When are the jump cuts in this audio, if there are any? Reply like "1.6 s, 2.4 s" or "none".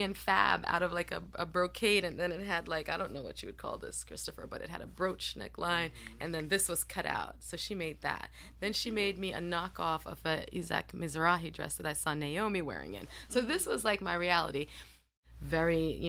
none